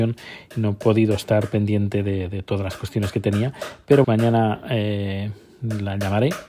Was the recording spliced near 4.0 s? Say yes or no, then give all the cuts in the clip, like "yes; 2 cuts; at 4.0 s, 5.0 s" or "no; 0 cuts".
yes; 1 cut; at 4.0 s